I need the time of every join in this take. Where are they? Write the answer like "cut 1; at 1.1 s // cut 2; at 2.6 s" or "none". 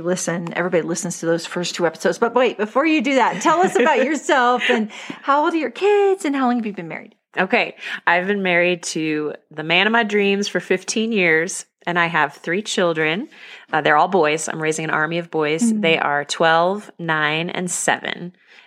none